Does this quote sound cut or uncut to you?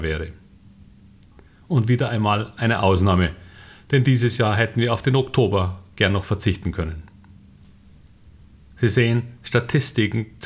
uncut